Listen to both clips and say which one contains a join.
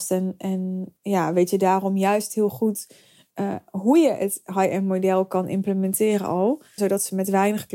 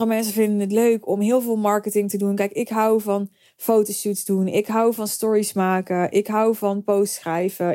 first; 1 cut; at 6.8 s

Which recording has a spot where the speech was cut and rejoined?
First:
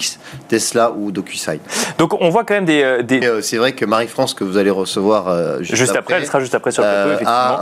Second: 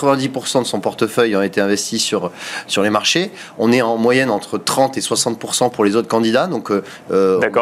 first; 1 cut; at 3.2 s

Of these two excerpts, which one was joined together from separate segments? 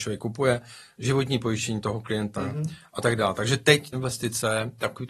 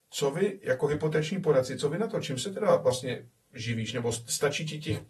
first; 1 cut; at 3.9 s

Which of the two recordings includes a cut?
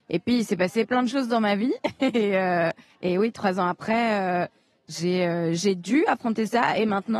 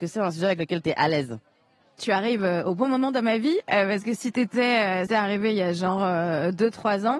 second; 2 cuts; at 2.0 s, 5.1 s

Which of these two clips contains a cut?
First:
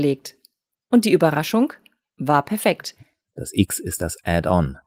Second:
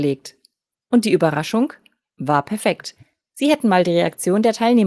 first; 1 cut; at 3.2 s

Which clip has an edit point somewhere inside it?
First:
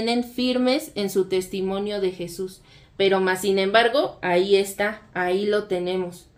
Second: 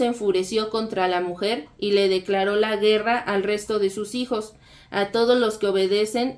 first; 1 cut; at 2.8 s

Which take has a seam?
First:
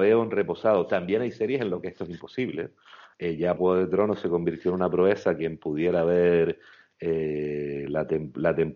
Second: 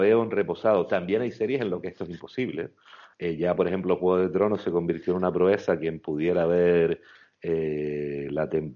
first; 1 cut; at 3.6 s

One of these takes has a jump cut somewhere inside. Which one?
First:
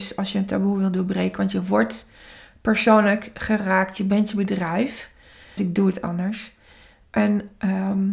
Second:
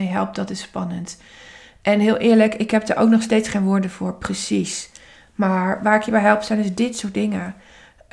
first; 1 cut; at 5.6 s

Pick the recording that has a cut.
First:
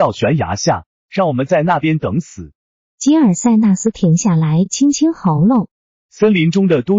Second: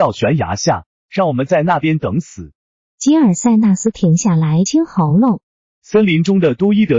second; 1 cut; at 4.7 s

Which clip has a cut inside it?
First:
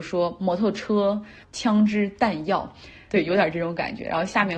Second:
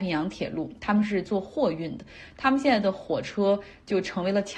first; 1 cut; at 3.1 s

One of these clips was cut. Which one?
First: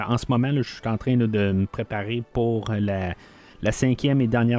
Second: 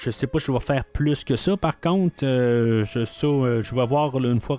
second; 1 cut; at 3.6 s

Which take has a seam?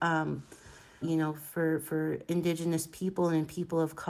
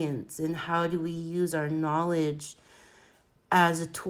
first; 1 cut; at 1.0 s

